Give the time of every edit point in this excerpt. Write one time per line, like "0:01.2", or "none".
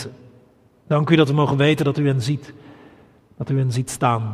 none